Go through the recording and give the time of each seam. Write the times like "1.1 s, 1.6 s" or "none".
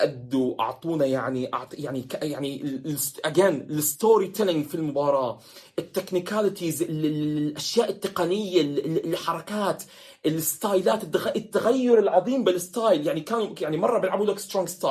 none